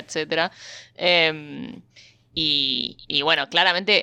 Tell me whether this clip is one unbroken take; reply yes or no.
yes